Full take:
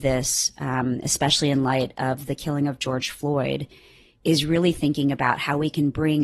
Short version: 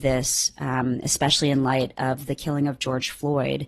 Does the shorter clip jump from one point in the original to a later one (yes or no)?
no